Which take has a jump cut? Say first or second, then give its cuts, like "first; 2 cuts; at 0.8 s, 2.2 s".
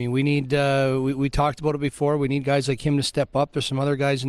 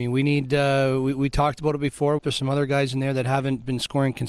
second; 1 cut; at 2.2 s